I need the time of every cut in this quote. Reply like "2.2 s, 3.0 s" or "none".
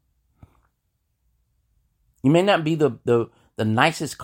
none

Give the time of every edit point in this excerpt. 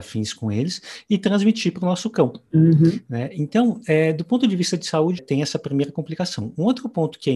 5.2 s

